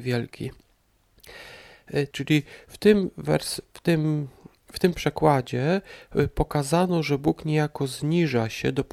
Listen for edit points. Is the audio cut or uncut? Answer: cut